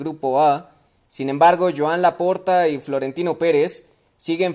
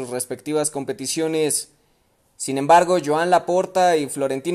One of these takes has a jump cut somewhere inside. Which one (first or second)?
first